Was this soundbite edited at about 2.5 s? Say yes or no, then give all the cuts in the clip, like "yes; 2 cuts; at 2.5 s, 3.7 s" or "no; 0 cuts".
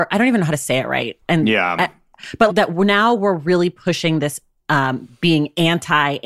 yes; 1 cut; at 2.5 s